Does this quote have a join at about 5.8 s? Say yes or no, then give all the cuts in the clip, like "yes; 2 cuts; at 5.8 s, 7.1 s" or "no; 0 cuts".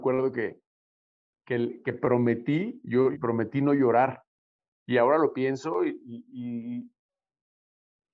no; 1 cut; at 3.1 s